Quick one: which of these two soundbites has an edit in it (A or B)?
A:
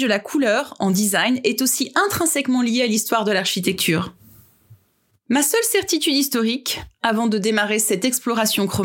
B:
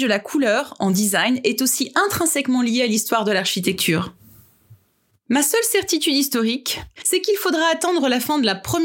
B